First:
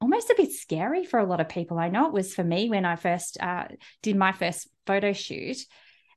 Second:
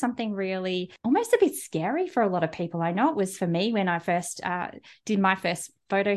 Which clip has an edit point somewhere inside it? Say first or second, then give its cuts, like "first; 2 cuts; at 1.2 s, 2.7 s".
second; 1 cut; at 1.0 s